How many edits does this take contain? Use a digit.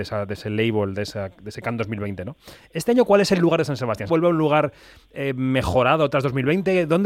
1